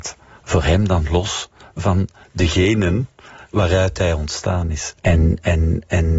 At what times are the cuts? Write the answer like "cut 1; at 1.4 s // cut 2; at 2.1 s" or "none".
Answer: cut 1; at 5.0 s